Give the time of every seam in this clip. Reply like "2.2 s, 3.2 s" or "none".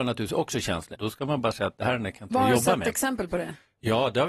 0.9 s

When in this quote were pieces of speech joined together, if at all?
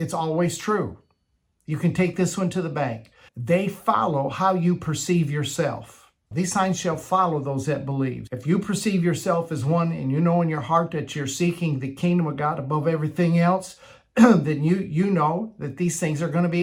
3.3 s, 6.3 s, 8.3 s

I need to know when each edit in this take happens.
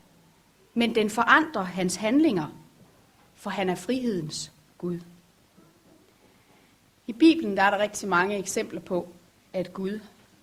none

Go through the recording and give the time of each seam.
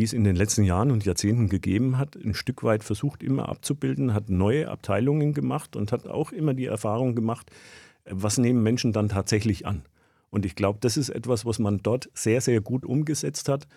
none

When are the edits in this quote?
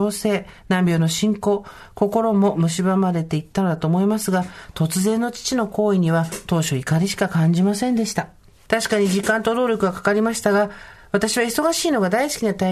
none

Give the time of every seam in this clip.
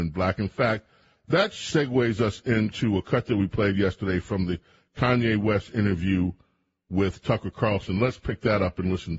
none

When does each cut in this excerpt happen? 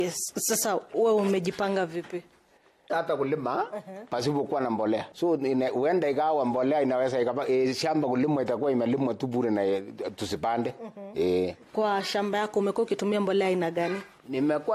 2.9 s, 11.7 s

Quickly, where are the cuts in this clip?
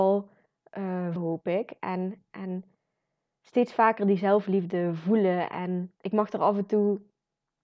1.2 s, 6.0 s

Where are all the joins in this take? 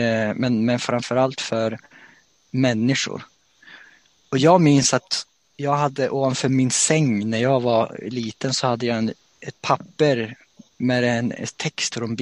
none

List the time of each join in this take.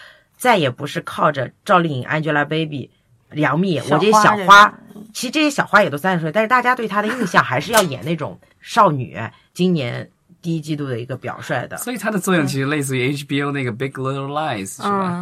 9.5 s

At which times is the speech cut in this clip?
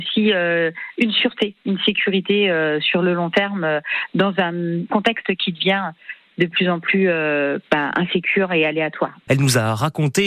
9.3 s

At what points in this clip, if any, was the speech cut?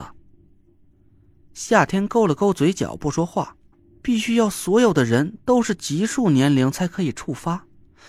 3.7 s

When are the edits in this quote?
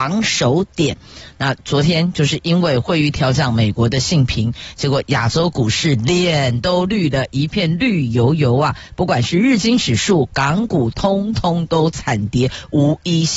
none

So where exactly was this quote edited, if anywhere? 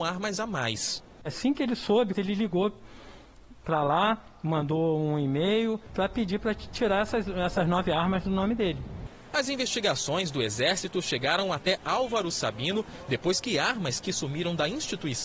2.1 s

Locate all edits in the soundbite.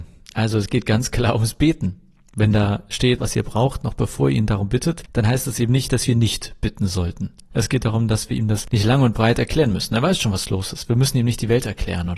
3.2 s

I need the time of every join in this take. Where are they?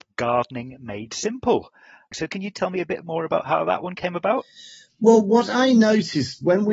2.1 s

